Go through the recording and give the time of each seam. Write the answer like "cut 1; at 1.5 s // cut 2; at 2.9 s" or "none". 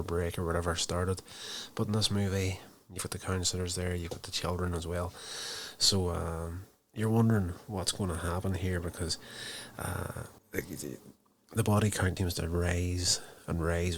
cut 1; at 10.4 s // cut 2; at 12.2 s